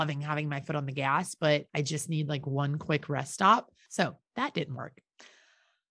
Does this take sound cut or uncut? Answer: cut